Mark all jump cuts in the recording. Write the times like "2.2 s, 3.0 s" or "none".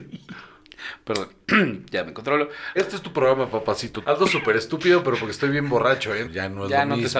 2.8 s, 4.0 s, 6.2 s